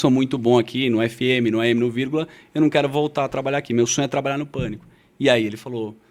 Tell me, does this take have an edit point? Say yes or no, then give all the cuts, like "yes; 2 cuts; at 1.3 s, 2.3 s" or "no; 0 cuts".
no; 0 cuts